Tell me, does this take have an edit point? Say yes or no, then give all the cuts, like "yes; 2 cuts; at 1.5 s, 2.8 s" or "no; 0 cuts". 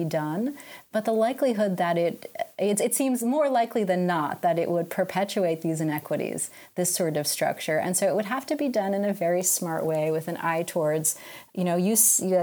no; 0 cuts